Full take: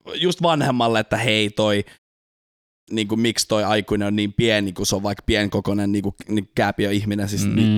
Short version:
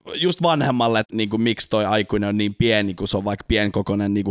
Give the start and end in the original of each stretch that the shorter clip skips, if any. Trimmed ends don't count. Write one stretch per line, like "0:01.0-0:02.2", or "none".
0:01.0-0:02.8